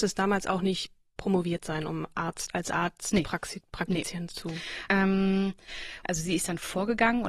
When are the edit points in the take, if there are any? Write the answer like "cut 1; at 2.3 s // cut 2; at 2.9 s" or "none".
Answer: cut 1; at 4.9 s // cut 2; at 6.0 s